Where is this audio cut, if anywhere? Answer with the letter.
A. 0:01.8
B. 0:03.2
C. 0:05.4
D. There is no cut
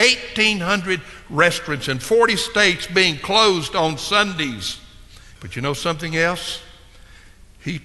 C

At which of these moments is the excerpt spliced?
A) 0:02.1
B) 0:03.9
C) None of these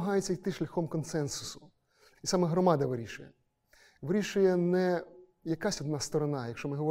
A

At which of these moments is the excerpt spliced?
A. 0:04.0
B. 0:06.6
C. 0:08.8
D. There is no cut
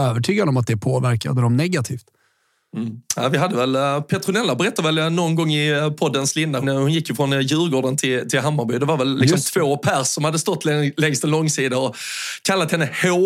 B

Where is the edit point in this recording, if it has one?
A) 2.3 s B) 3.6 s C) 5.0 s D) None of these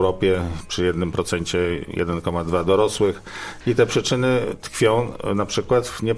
B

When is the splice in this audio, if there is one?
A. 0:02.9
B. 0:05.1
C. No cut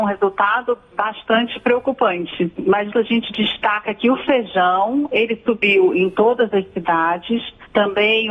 A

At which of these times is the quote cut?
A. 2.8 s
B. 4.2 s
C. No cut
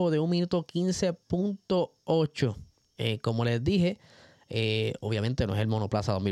C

